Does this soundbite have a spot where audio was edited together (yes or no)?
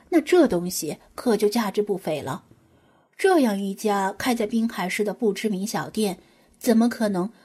no